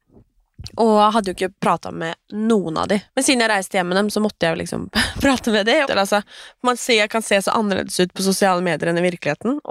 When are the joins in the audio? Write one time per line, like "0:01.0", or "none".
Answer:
0:03.1
0:05.8